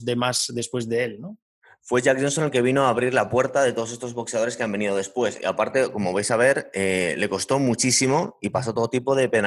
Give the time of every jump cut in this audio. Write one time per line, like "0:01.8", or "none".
none